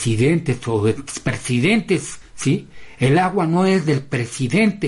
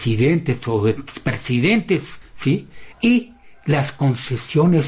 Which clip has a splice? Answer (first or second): second